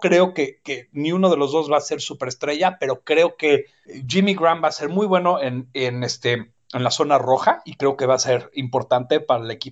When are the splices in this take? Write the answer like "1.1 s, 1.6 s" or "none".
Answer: none